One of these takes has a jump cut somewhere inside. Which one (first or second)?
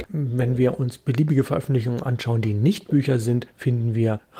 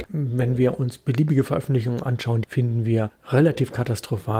second